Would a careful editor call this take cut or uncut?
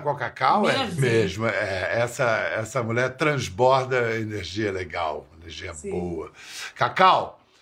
cut